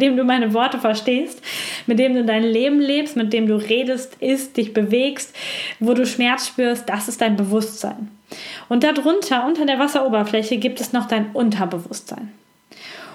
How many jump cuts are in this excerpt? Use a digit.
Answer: 1